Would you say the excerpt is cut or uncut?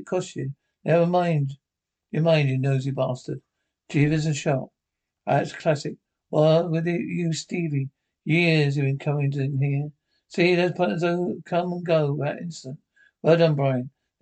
cut